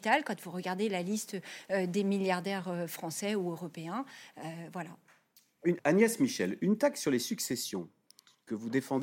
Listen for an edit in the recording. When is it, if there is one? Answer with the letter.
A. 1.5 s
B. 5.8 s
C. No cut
B